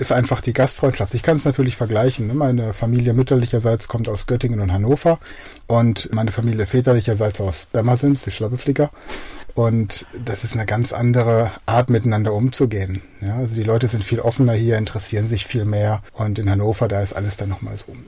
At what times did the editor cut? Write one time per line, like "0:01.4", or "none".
0:16.1